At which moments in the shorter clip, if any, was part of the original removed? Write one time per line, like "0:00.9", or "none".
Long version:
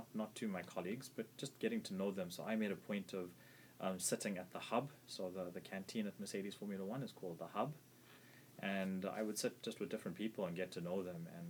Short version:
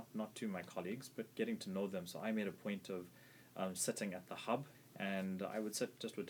0:01.3
0:04.7